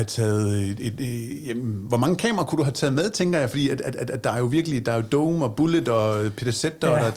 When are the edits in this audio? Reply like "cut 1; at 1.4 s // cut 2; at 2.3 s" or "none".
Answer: none